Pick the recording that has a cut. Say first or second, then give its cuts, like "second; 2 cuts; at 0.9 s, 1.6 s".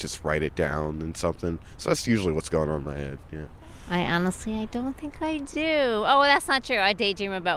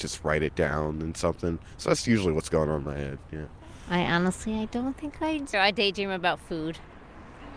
second; 1 cut; at 5.5 s